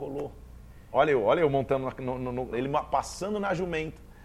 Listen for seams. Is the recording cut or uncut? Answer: cut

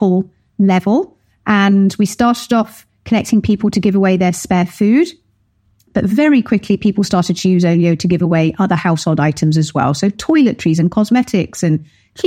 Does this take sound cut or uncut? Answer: uncut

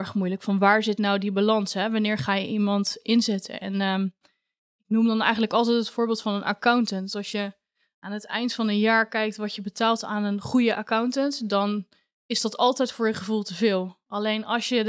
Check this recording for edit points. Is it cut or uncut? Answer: uncut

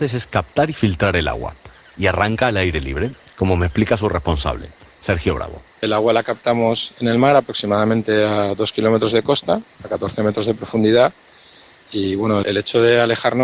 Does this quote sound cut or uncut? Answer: cut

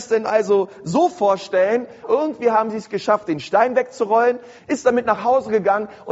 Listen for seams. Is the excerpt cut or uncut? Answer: cut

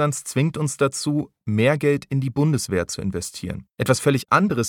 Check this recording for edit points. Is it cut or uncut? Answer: cut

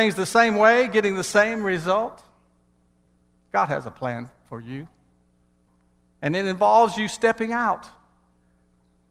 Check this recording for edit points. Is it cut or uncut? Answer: uncut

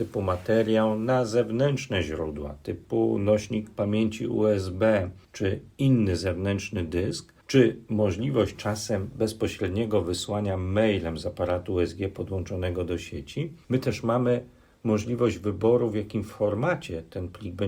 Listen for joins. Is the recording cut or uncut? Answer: uncut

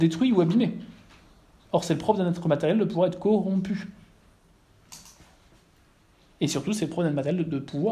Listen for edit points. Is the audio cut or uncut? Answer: uncut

